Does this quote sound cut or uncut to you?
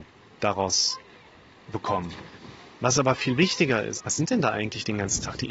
cut